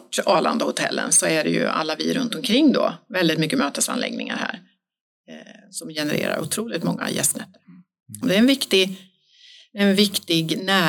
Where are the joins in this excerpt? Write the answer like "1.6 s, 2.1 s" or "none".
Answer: 8.2 s